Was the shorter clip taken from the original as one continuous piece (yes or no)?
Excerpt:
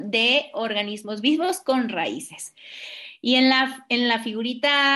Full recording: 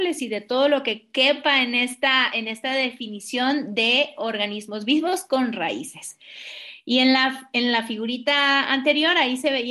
yes